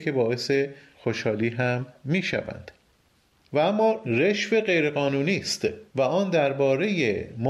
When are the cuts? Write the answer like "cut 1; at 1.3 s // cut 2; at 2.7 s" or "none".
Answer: cut 1; at 5.9 s